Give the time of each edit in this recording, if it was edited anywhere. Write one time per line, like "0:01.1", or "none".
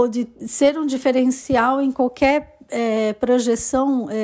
none